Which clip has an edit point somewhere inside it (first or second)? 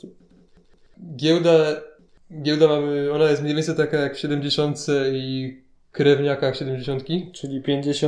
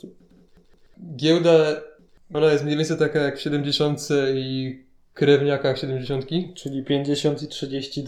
second